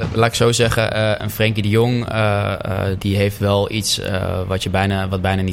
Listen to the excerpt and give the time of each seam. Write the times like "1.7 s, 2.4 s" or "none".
3.0 s